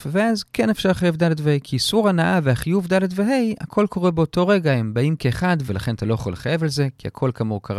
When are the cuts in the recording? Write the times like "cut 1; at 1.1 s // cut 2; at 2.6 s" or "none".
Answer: cut 1; at 5.7 s